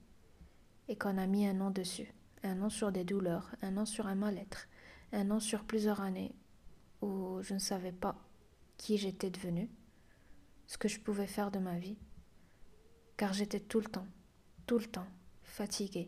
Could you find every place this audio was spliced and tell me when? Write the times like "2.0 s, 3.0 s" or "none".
none